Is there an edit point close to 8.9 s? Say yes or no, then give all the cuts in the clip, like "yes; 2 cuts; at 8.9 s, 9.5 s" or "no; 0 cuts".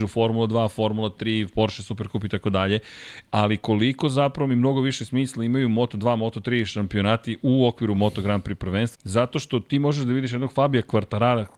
yes; 2 cuts; at 7.4 s, 8.9 s